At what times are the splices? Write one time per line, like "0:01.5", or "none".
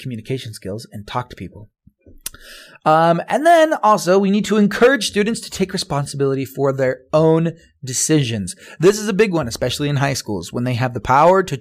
none